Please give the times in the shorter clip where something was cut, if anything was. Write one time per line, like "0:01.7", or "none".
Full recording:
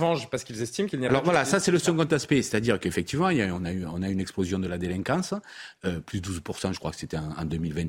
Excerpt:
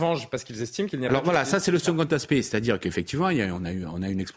none